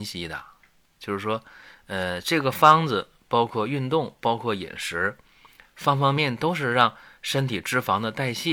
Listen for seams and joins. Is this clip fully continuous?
no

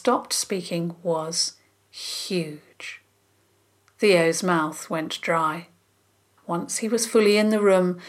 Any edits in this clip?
yes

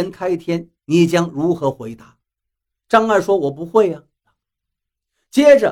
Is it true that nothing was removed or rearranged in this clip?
no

